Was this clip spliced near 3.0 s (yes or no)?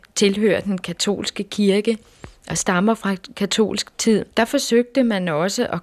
no